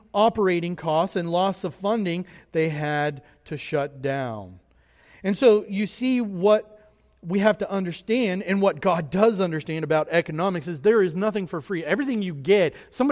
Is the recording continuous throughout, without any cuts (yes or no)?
yes